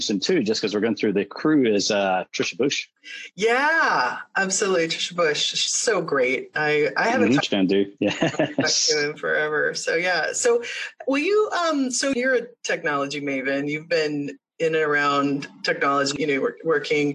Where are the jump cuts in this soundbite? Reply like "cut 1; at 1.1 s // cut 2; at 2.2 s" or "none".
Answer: cut 1; at 7.4 s // cut 2; at 12.1 s // cut 3; at 16.2 s